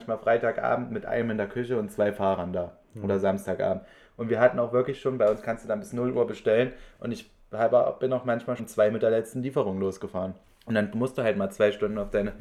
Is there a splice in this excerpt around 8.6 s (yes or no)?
yes